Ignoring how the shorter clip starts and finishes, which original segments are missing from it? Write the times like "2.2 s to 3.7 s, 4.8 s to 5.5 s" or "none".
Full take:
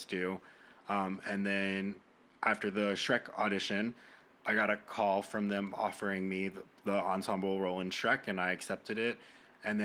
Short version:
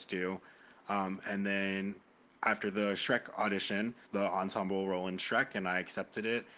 4.0 s to 6.8 s

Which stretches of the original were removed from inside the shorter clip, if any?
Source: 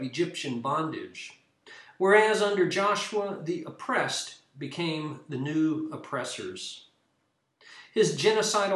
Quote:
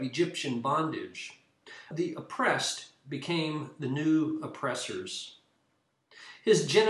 1.9 s to 3.4 s

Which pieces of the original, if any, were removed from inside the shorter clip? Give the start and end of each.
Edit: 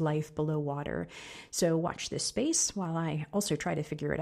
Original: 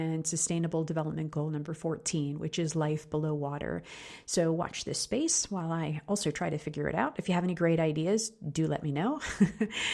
none

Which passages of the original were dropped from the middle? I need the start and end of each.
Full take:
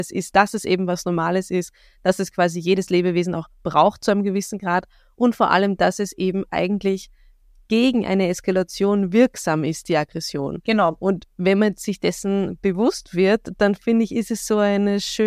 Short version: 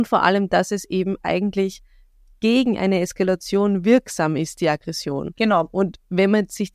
none

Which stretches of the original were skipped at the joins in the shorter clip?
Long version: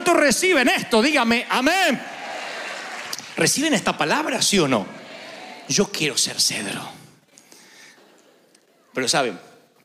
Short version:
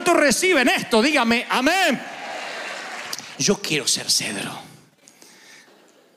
3.3 s to 5.6 s

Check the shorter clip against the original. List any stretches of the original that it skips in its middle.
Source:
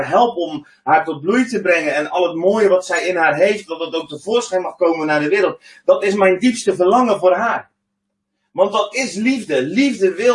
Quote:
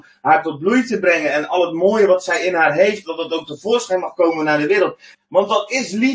5.8 s to 8.4 s

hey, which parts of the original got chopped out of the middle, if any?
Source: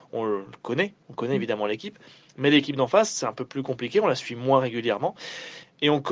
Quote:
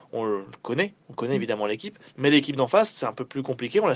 2.1 s to 2.3 s

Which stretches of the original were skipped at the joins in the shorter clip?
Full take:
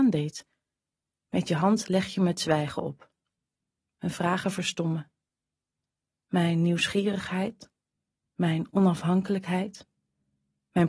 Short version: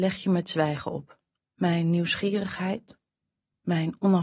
3.3 s to 6.1 s

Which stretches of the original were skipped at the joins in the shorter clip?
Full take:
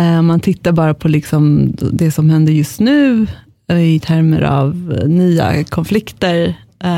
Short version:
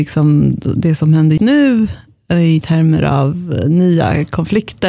2.5 s to 2.8 s

